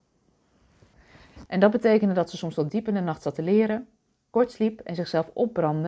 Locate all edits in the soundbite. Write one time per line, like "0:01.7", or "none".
0:01.5